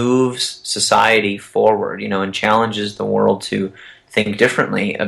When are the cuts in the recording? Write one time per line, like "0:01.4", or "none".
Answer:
none